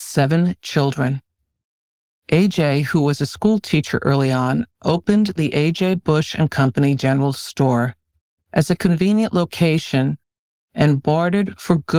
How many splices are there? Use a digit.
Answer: 0